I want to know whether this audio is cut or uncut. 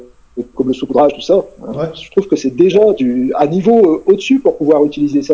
cut